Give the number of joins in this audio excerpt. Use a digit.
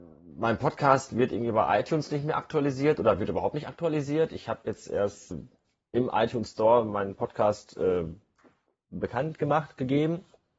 1